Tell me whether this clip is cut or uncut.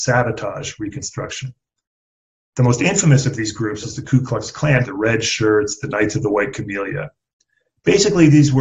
cut